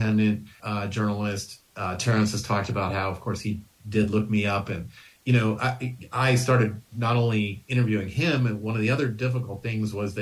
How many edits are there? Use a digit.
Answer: 0